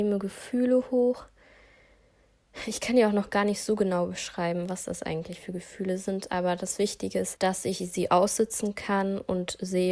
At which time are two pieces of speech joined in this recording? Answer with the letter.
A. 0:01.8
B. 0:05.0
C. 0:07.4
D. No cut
C